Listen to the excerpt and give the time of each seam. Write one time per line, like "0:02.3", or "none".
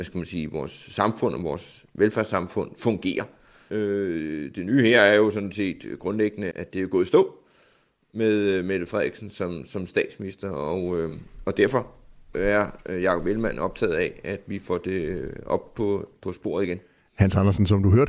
0:03.7
0:06.5